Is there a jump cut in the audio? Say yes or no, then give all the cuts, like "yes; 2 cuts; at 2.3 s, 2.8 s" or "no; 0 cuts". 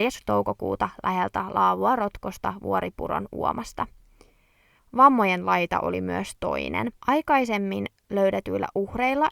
yes; 2 cuts; at 4.8 s, 7.0 s